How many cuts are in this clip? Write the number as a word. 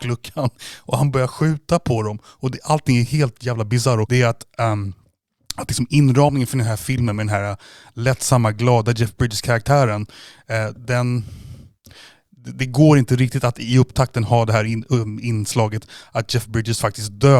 one